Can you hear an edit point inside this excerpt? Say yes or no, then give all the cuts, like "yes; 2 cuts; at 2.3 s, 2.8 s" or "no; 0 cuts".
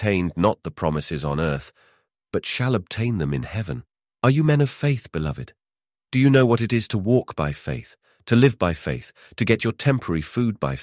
no; 0 cuts